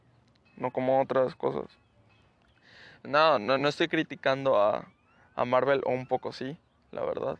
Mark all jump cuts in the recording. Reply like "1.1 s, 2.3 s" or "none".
none